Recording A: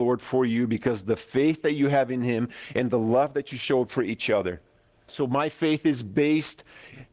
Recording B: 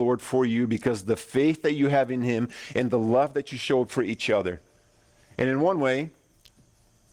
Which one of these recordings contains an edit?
A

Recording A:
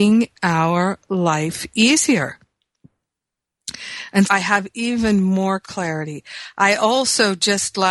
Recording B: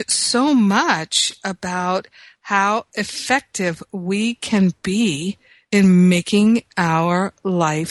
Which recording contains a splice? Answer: A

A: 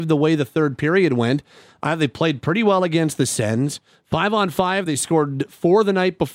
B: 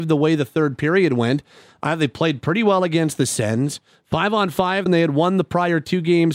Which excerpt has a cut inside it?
B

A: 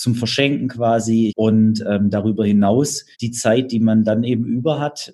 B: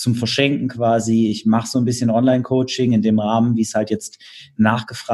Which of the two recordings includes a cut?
A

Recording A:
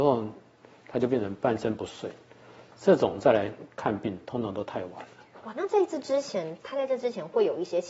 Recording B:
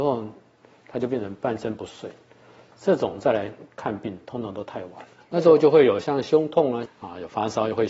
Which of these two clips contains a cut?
B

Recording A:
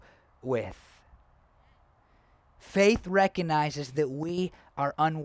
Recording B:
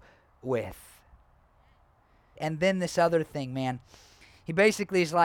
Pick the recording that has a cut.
B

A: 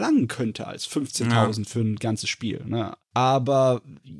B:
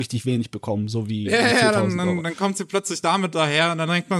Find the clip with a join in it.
A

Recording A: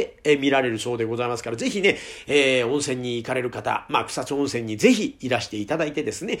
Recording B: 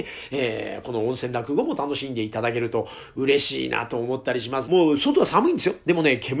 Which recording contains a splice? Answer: B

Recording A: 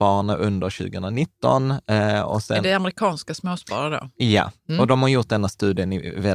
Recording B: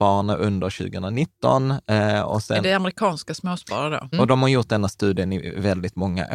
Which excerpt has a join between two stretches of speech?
B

